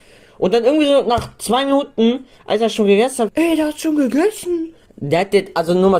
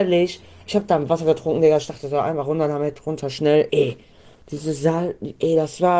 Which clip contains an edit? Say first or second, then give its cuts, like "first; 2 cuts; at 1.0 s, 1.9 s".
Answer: first; 2 cuts; at 3.3 s, 4.9 s